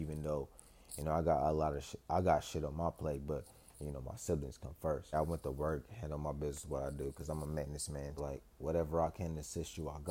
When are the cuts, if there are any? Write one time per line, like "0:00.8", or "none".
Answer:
0:05.1
0:08.2